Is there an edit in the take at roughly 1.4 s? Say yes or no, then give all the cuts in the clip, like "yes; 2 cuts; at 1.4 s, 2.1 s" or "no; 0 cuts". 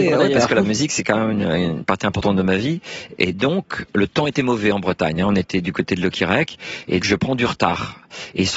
no; 1 cut; at 7.0 s